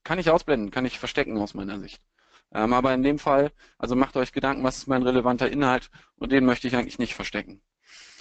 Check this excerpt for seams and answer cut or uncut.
uncut